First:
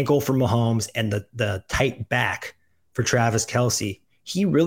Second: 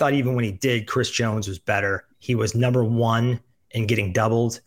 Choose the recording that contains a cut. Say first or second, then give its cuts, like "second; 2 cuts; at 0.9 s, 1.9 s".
second; 1 cut; at 2.1 s